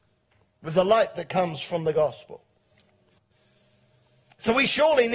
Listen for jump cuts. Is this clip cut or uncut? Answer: uncut